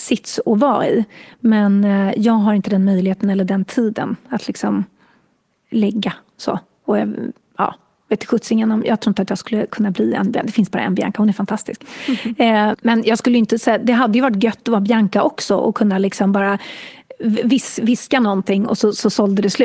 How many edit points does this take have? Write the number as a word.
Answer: one